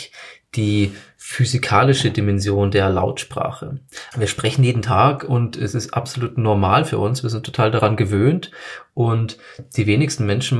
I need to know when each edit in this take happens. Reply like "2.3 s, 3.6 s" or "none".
4.1 s